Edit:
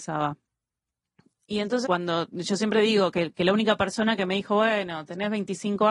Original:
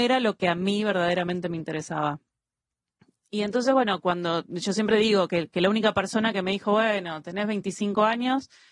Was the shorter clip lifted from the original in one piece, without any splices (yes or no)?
no